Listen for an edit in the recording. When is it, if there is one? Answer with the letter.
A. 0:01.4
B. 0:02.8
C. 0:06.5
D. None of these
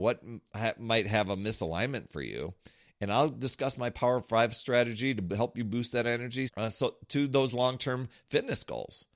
C